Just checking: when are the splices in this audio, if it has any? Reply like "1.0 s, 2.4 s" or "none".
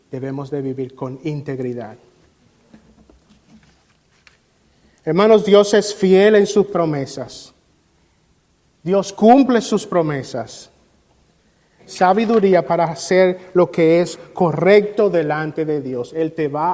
11.8 s